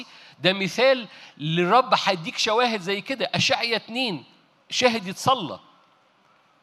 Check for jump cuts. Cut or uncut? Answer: uncut